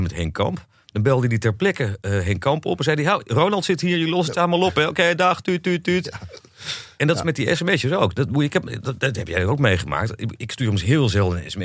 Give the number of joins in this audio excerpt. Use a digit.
0